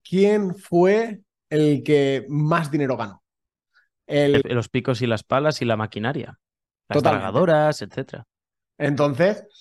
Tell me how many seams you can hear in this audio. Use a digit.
1